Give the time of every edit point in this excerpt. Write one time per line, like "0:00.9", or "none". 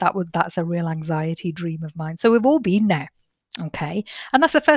none